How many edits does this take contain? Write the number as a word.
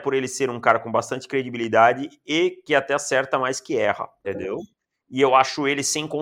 one